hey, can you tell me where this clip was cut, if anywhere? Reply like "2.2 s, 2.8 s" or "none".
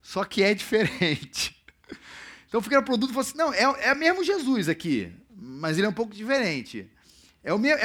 none